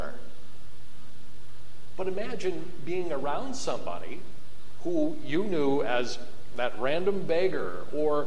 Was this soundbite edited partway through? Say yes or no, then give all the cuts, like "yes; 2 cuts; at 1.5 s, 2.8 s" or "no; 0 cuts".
no; 0 cuts